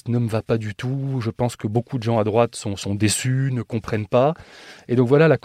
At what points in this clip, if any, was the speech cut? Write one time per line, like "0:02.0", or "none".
none